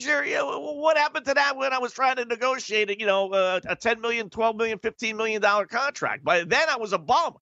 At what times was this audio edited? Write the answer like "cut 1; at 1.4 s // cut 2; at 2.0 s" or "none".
none